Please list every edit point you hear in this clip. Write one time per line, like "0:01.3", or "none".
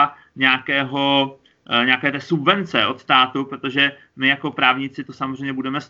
none